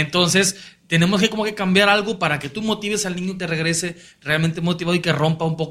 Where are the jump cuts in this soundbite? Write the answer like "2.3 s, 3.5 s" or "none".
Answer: 3.4 s